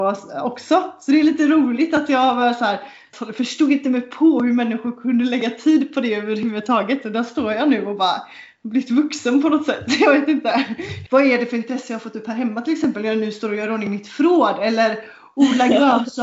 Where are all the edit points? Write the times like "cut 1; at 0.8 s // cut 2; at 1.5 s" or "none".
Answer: cut 1; at 3.1 s // cut 2; at 11.1 s